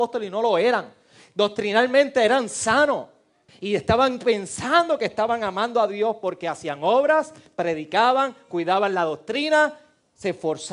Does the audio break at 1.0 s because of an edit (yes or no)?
no